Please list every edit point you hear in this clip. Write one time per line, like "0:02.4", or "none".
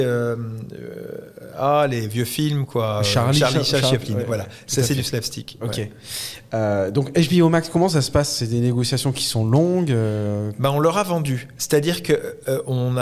none